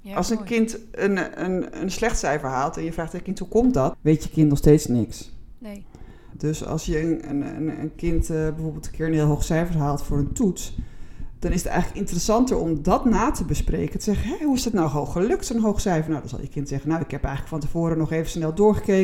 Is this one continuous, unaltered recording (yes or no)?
no